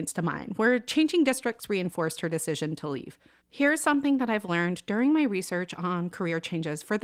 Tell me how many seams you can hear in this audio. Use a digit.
1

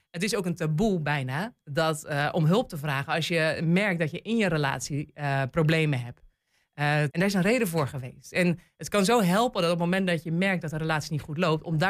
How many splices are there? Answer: 1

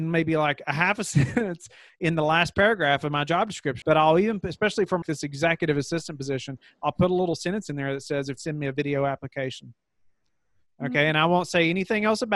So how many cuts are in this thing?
3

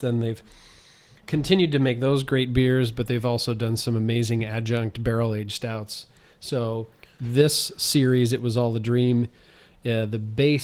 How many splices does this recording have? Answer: 0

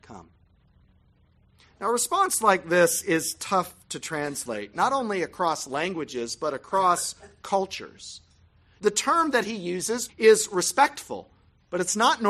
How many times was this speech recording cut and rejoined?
2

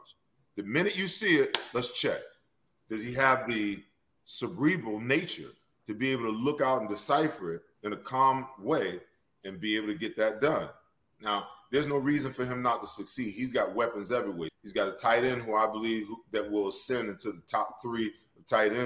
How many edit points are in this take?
1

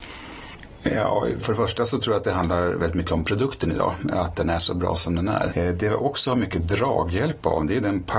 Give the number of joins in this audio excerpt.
2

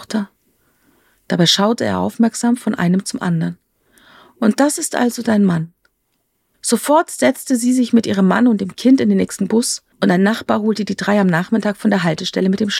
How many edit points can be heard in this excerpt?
2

